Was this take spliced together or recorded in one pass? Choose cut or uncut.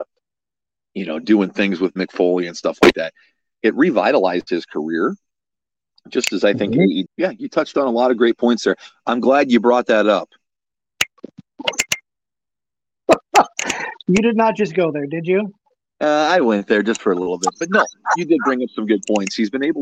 cut